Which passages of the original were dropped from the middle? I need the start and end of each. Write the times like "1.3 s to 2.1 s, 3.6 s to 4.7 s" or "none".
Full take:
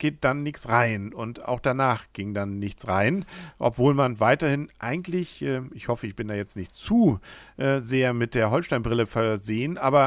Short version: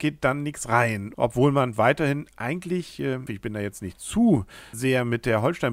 1.1 s to 3.6 s, 5.7 s to 6.0 s, 7.5 s to 7.8 s